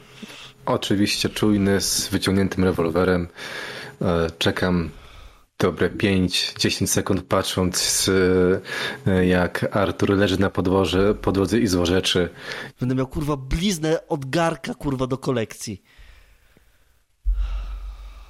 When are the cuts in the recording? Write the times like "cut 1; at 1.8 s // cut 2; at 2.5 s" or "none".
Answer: cut 1; at 12.7 s